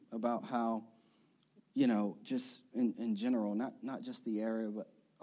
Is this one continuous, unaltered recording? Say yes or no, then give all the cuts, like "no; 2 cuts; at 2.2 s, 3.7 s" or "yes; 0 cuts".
yes; 0 cuts